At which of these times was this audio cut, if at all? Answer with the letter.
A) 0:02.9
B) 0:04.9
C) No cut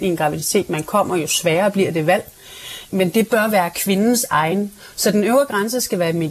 A